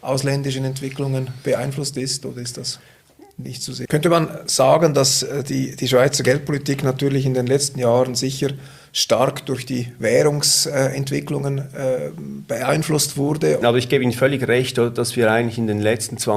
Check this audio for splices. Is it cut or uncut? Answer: cut